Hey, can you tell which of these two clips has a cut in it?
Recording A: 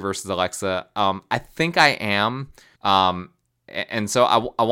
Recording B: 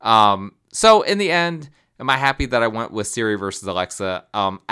A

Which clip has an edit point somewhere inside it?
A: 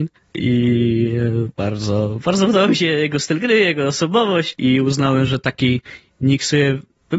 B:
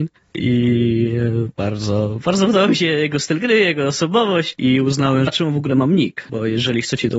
B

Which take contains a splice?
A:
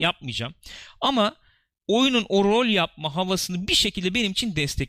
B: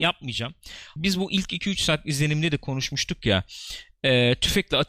B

